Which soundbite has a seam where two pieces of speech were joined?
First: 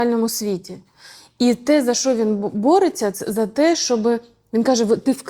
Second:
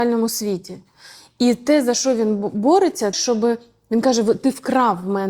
second; 1 cut; at 3.1 s

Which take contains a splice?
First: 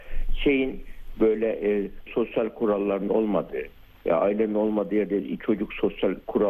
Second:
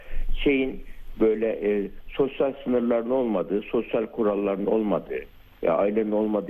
first; 1 cut; at 2.1 s

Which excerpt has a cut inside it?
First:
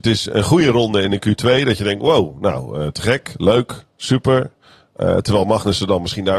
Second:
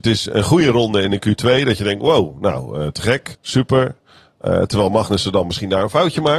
second; 1 cut; at 3.3 s

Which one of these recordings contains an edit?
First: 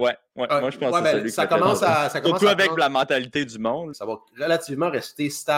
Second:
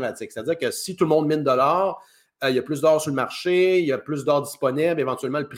first; 1 cut; at 3.9 s

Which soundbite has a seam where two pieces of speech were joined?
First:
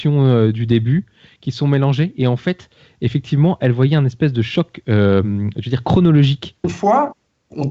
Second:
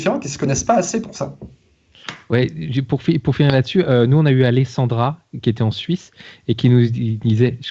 first; 1 cut; at 6.6 s

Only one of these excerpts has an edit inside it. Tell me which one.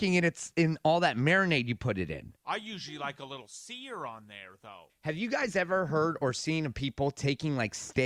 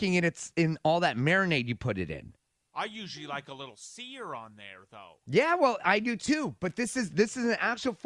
first; 2 cuts; at 2.4 s, 4.9 s

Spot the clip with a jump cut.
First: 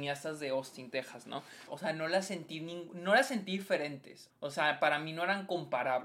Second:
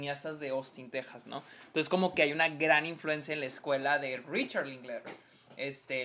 first; 2 cuts; at 1.7 s, 4.3 s

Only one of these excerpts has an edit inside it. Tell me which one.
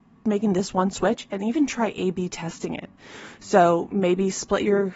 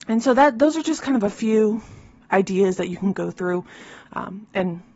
second; 1 cut; at 4.1 s

